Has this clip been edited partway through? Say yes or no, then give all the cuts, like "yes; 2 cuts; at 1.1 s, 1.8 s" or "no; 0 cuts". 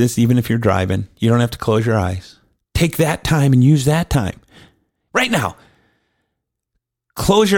yes; 2 cuts; at 2.6 s, 5.1 s